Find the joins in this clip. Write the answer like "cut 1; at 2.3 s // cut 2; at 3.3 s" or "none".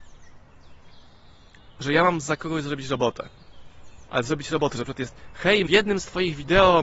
cut 1; at 4.1 s // cut 2; at 5.7 s